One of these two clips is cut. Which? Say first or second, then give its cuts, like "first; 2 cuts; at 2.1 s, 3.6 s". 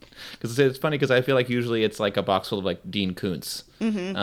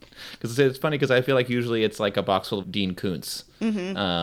second; 1 cut; at 2.6 s